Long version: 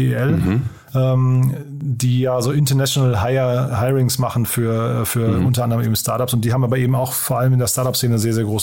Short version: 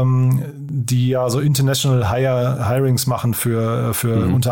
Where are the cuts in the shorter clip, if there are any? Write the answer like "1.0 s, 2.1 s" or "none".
none